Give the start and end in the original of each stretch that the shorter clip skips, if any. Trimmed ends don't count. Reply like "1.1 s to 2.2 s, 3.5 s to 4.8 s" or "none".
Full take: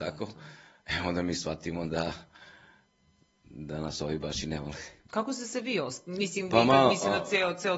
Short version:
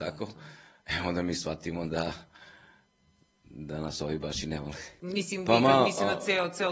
5.0 s to 6.0 s